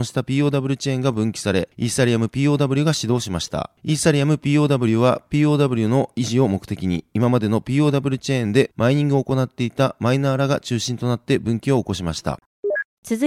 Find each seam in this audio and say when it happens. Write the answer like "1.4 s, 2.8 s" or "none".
none